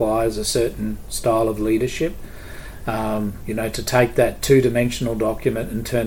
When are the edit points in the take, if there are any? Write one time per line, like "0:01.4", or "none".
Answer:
none